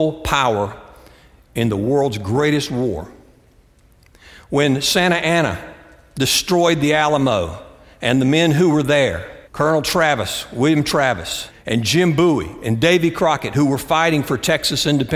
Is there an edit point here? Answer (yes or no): yes